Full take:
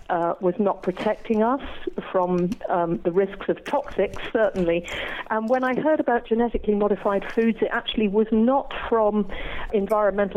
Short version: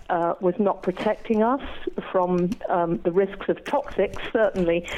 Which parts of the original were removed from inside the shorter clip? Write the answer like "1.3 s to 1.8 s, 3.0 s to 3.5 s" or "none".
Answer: none